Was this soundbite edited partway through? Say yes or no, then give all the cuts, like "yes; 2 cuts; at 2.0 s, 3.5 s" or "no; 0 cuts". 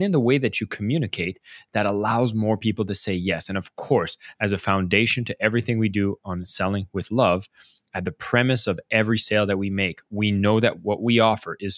no; 0 cuts